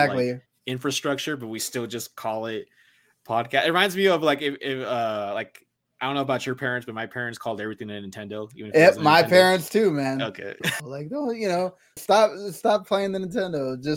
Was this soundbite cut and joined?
yes; 2 cuts; at 10.8 s, 12.0 s

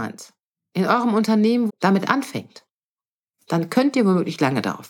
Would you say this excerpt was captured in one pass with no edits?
no; 1 cut; at 1.7 s

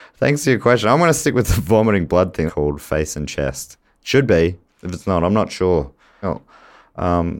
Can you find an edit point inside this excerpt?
yes; 2 cuts; at 2.5 s, 6.2 s

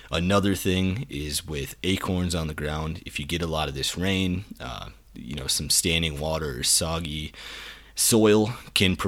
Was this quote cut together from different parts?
no; 0 cuts

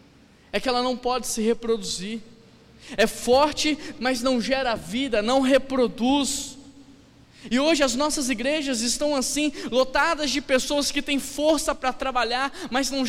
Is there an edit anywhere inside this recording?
yes; 1 cut; at 4.0 s

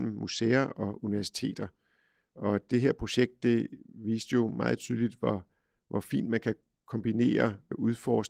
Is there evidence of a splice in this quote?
no; 0 cuts

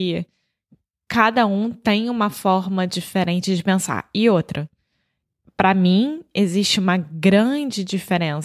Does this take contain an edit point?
no; 0 cuts

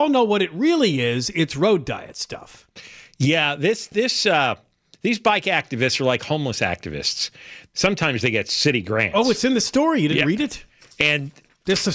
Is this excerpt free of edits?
no; 1 cut; at 7.7 s

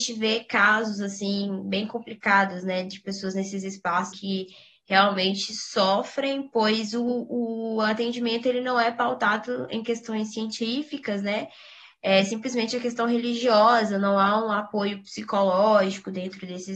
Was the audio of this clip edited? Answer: yes; 1 cut; at 4.1 s

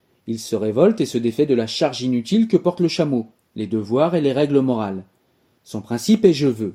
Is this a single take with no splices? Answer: yes; 0 cuts

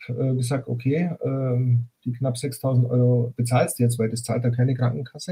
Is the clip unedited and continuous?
yes; 0 cuts

